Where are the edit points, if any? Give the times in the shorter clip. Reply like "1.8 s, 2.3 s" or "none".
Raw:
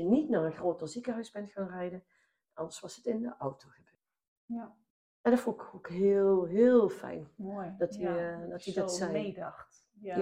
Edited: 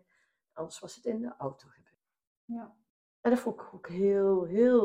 none